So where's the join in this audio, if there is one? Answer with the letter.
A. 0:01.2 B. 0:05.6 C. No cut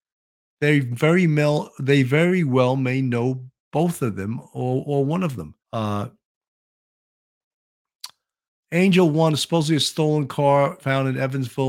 B